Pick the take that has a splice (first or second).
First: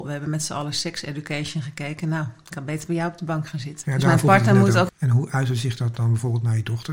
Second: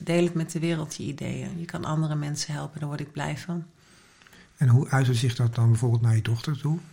first